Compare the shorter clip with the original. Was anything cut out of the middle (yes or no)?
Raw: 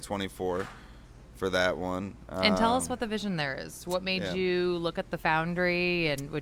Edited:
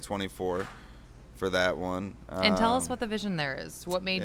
no